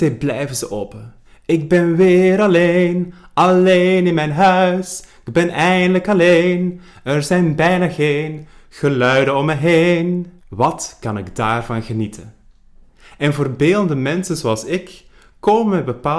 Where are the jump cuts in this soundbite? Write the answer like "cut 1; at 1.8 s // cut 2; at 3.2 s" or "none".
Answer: cut 1; at 10.4 s

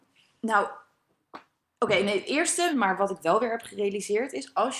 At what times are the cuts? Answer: cut 1; at 2.7 s

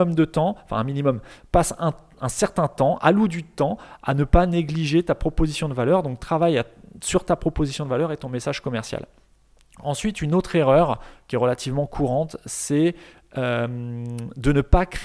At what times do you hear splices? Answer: none

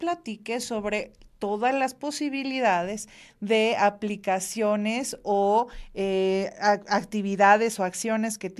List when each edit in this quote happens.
none

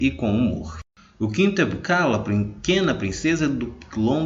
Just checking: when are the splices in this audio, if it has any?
none

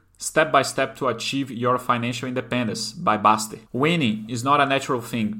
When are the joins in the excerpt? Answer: cut 1; at 3.7 s

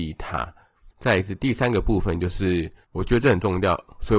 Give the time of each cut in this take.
cut 1; at 0.9 s

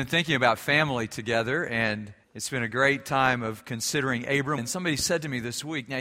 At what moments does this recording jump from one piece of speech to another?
cut 1; at 2.2 s // cut 2; at 4.6 s

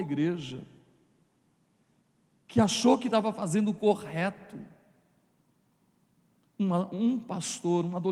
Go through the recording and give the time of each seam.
cut 1; at 6.5 s

